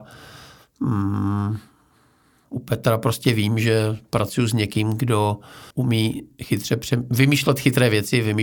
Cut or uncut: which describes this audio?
cut